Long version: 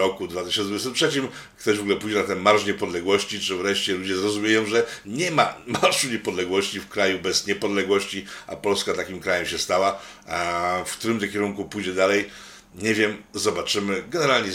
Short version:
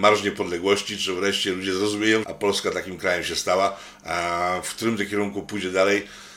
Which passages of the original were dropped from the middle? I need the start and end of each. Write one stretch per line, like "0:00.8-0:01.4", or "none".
0:04.7-0:08.5